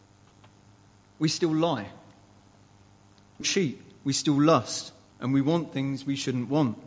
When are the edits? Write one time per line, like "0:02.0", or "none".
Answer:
0:03.4
0:05.1